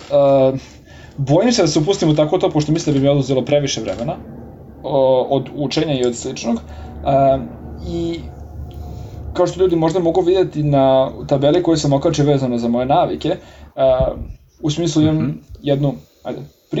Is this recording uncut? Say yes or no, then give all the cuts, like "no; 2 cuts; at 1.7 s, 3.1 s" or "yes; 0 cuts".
no; 2 cuts; at 9.3 s, 13.7 s